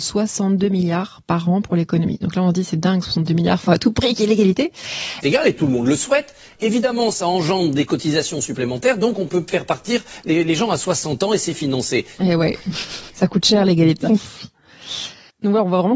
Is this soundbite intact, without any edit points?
no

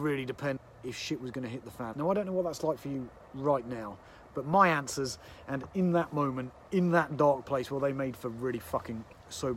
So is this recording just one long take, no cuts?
no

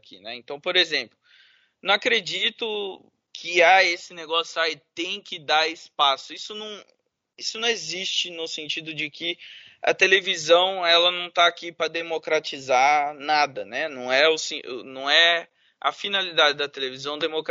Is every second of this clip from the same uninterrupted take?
yes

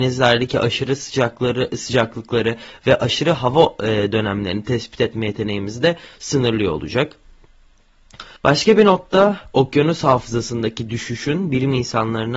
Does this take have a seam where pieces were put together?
yes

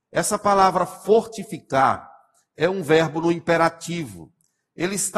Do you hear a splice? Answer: no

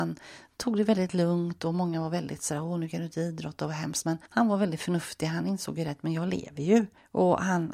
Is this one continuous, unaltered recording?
yes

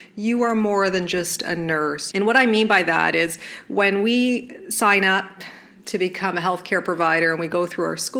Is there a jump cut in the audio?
yes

